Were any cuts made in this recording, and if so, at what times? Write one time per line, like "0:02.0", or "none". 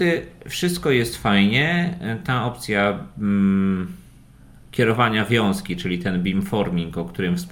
none